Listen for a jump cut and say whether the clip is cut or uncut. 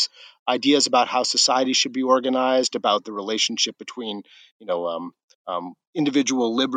uncut